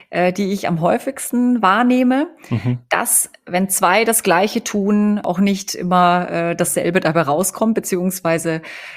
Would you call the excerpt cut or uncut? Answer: uncut